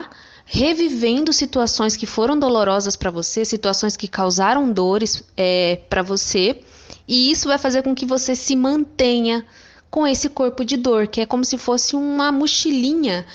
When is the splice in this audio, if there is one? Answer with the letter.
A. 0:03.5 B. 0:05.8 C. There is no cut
C